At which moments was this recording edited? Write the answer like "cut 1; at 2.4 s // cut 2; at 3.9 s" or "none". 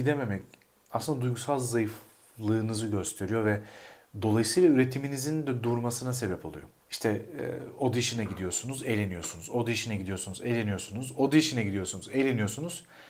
none